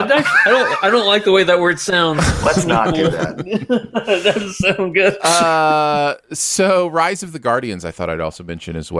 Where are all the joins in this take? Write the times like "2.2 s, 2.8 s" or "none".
none